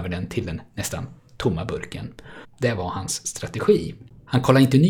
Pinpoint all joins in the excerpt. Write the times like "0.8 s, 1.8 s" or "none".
2.4 s